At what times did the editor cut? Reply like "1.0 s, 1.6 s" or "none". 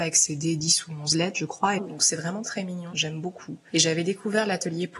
1.8 s, 2.9 s